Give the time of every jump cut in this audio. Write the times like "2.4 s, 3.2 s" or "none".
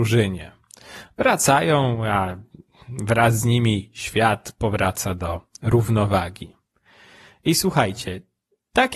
none